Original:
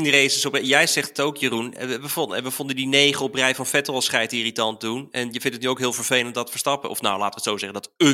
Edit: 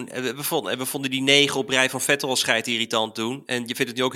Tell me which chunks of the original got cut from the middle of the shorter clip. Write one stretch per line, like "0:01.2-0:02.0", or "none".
none